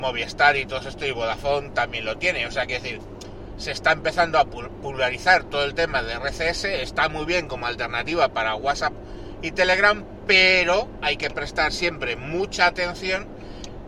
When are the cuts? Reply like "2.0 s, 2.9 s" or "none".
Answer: none